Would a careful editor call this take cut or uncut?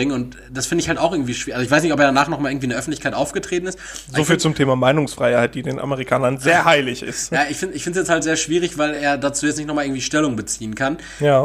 uncut